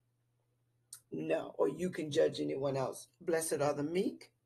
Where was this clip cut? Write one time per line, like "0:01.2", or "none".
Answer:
0:01.0
0:03.1